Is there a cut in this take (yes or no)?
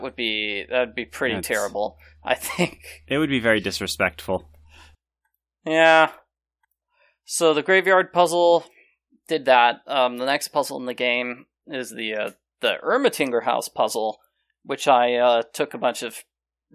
no